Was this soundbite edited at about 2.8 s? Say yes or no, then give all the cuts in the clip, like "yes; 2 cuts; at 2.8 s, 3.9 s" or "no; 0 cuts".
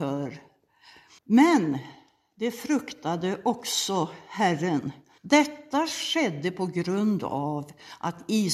no; 2 cuts; at 1.2 s, 5.2 s